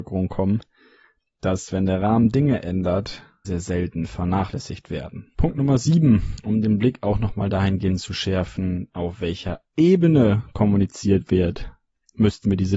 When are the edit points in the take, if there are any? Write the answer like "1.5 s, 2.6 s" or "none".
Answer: 3.4 s, 5.3 s